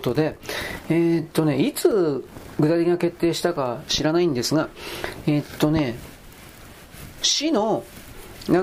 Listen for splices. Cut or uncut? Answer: uncut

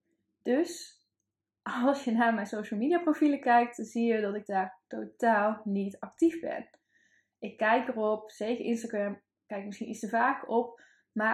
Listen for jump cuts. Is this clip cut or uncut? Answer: uncut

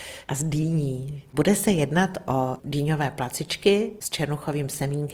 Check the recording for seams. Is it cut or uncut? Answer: cut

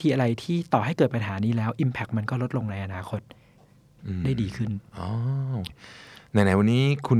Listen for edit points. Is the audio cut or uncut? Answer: cut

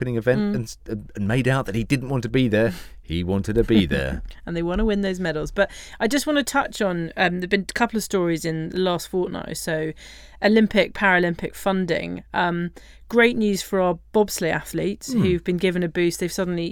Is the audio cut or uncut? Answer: uncut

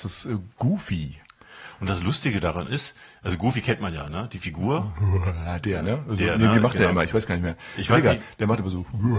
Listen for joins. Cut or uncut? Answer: uncut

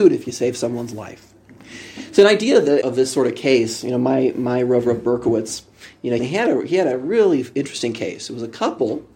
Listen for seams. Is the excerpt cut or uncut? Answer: cut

